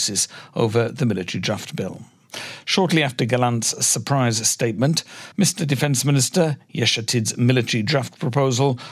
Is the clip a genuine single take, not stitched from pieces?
no; 1 cut; at 5.3 s

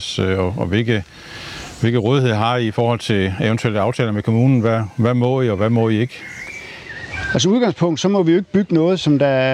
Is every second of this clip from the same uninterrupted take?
yes; 0 cuts

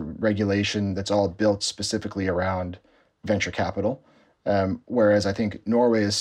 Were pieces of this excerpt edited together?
no; 0 cuts

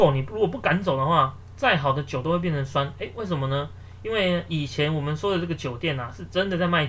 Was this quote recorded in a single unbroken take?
yes; 0 cuts

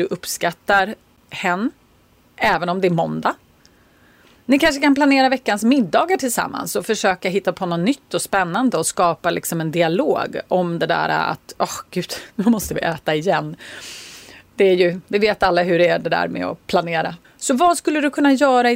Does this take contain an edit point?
yes; 2 cuts; at 15.0 s, 17.2 s

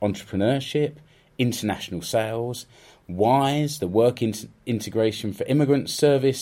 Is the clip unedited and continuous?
yes; 0 cuts

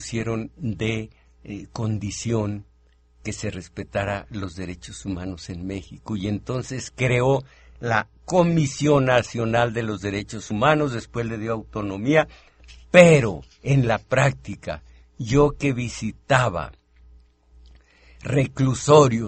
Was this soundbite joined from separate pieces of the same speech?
no; 0 cuts

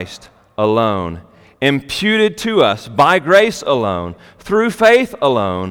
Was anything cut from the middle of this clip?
no; 0 cuts

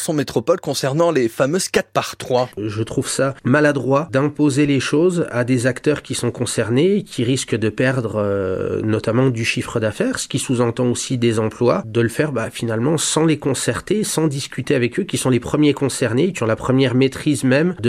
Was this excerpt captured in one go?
no; 1 cut; at 2.5 s

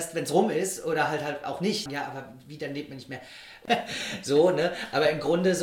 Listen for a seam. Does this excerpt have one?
yes; 2 cuts; at 1.9 s, 3.7 s

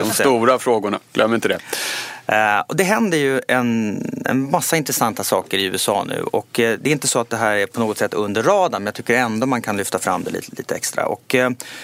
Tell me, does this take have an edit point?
no; 0 cuts

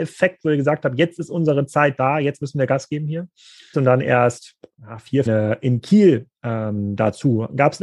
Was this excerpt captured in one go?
no; 2 cuts; at 3.7 s, 5.3 s

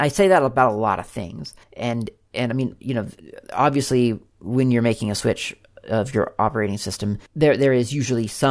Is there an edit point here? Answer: yes; 1 cut; at 1.6 s

